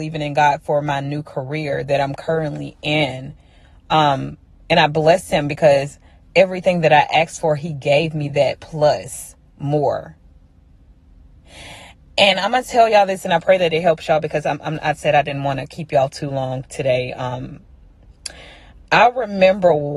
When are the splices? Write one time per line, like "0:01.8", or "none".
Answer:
none